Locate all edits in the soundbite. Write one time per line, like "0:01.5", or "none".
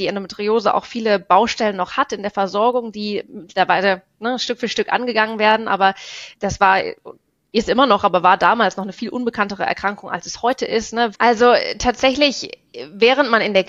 0:06.3
0:11.1